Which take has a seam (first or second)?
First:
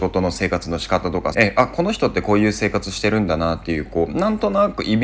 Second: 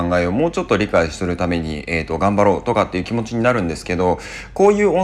first